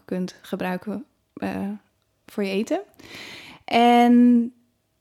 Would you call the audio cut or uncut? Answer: uncut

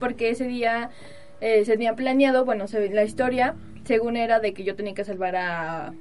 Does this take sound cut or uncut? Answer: uncut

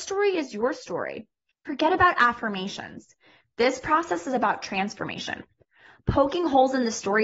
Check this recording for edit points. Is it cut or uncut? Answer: cut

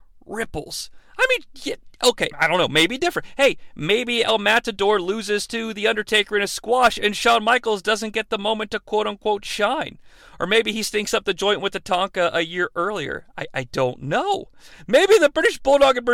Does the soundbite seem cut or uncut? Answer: cut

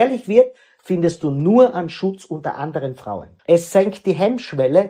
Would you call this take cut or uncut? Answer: cut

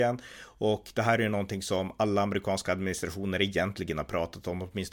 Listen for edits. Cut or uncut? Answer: uncut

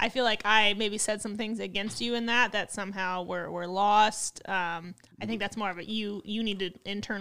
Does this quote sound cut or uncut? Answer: uncut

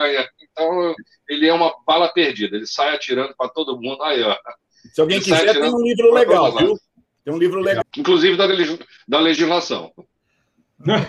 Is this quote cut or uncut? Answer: cut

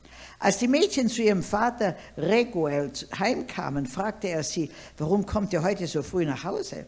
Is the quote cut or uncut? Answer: uncut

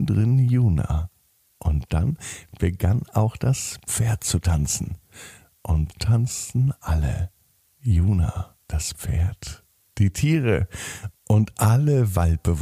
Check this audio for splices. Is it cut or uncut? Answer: cut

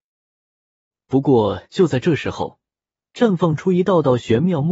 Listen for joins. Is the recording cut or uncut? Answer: cut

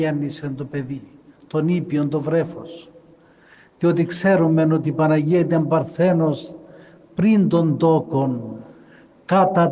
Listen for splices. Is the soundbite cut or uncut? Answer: uncut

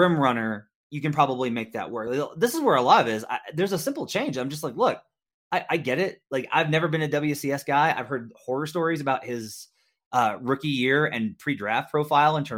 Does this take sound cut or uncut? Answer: uncut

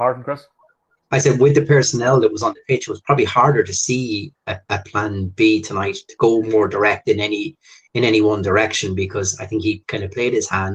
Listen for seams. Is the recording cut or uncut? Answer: uncut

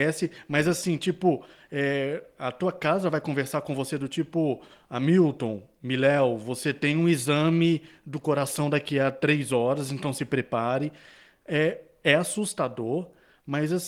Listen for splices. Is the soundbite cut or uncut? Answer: uncut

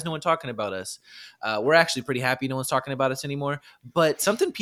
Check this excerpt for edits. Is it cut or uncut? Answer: uncut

